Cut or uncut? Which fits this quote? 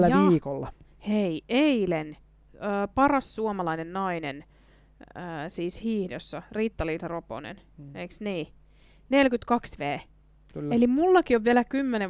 uncut